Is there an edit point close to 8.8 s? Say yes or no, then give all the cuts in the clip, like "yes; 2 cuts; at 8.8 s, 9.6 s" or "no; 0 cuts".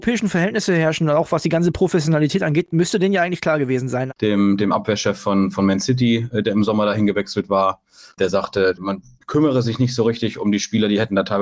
no; 1 cut; at 4.1 s